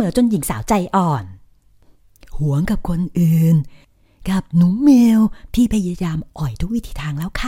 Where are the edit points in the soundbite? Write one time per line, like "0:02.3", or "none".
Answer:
none

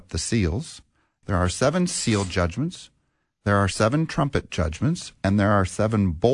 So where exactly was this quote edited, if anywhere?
0:01.2

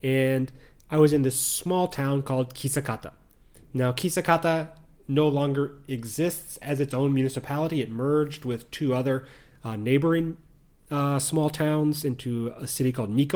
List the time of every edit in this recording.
none

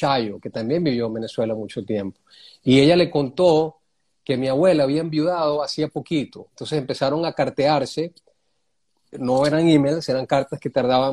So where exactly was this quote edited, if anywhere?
0:06.5

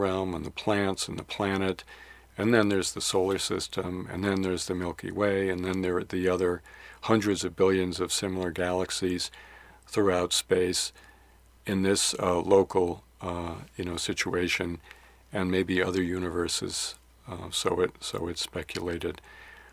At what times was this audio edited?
none

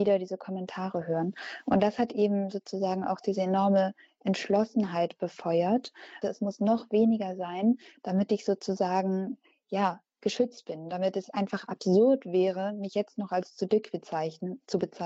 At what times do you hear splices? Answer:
0:06.2

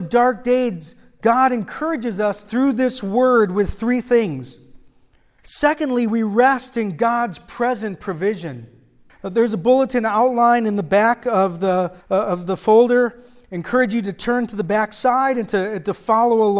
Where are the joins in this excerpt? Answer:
0:05.4
0:09.1
0:12.0

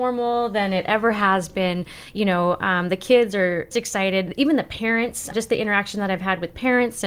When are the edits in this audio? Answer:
0:03.7
0:05.3

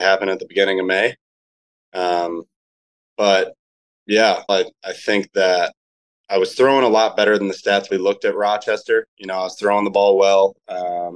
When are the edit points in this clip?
0:04.5
0:07.9

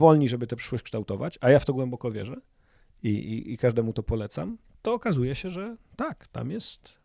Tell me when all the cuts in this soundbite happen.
none

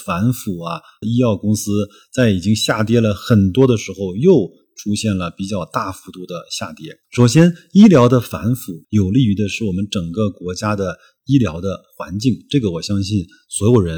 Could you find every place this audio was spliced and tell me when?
0:01.0
0:07.0
0:08.8

